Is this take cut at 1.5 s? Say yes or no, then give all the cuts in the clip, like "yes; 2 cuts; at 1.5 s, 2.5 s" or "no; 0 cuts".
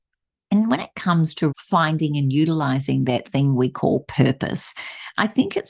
yes; 1 cut; at 1.5 s